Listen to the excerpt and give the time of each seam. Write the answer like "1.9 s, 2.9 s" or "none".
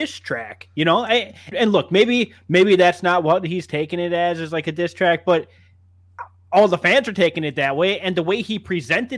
1.5 s